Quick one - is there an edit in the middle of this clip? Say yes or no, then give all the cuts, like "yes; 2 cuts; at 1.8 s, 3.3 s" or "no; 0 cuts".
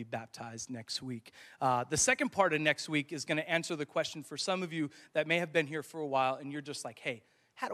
no; 0 cuts